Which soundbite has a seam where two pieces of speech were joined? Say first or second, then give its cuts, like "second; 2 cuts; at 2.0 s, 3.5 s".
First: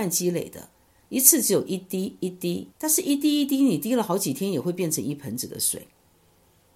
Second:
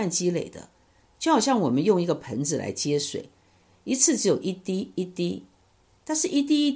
first; 2 cuts; at 1.1 s, 2.7 s